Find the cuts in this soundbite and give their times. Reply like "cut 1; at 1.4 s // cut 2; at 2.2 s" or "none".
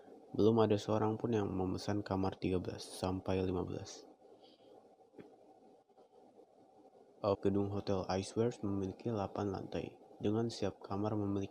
cut 1; at 7.3 s